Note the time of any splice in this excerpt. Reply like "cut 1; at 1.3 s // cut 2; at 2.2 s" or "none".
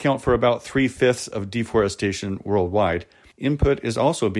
cut 1; at 3.3 s

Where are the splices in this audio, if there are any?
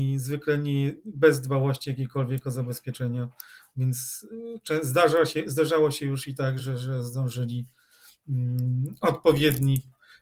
cut 1; at 6.6 s

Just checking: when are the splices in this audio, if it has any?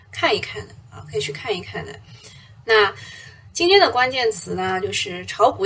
cut 1; at 2.6 s

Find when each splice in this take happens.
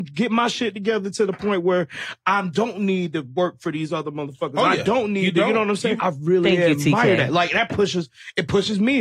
cut 1; at 6.0 s

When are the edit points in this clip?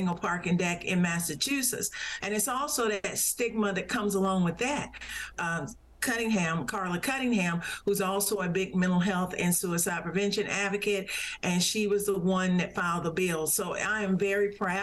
cut 1; at 2.2 s // cut 2; at 5.3 s

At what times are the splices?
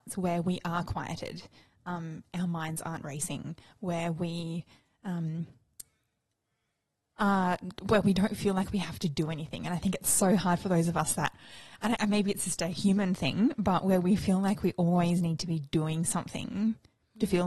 cut 1; at 12.0 s

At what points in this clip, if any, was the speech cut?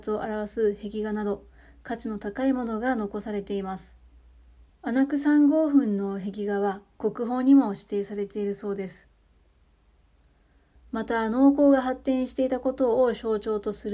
cut 1; at 4.7 s // cut 2; at 10.8 s

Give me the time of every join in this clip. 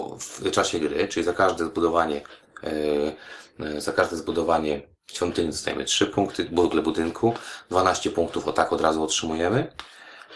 none

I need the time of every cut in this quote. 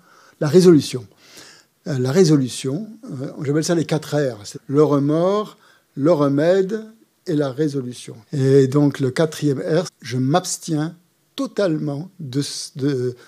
cut 1; at 4.5 s // cut 2; at 8.2 s // cut 3; at 9.9 s

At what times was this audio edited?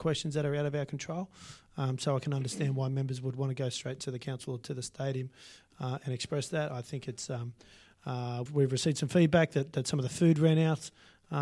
cut 1; at 8.5 s

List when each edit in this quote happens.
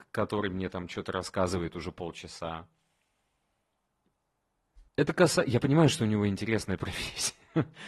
cut 1; at 4.9 s

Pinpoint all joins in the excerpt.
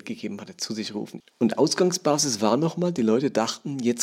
cut 1; at 1.2 s

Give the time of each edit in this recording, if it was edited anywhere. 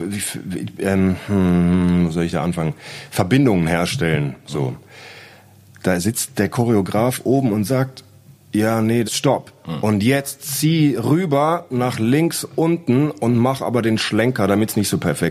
cut 1; at 5.7 s // cut 2; at 9.0 s

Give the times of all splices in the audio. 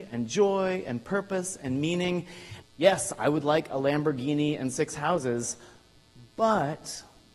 cut 1; at 2.6 s

